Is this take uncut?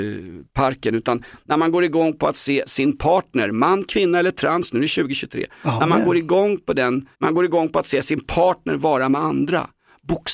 no; 1 cut; at 7.1 s

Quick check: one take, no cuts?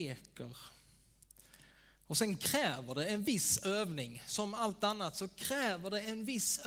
yes; 0 cuts

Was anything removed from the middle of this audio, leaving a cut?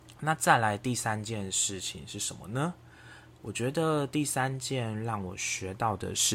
no; 0 cuts

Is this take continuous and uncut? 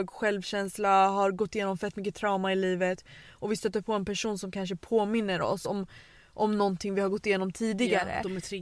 yes; 0 cuts

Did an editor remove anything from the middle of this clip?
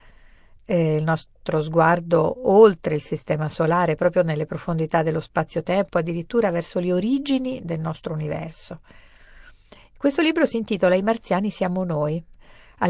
no; 0 cuts

